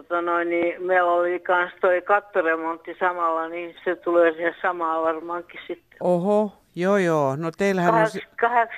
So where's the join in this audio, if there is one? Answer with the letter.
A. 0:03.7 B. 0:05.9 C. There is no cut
A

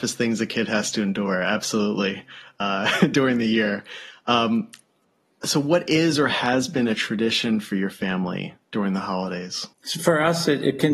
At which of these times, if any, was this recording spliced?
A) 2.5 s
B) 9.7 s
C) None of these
B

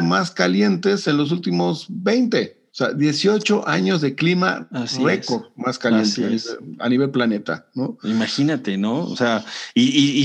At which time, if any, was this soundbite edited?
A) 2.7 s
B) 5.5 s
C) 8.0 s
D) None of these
A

